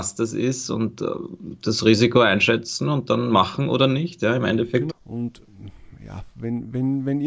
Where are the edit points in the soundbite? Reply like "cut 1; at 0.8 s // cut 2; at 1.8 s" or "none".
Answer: cut 1; at 4.9 s